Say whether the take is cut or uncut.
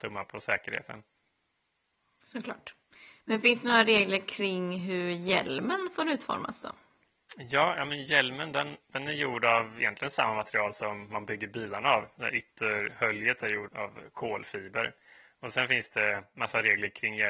cut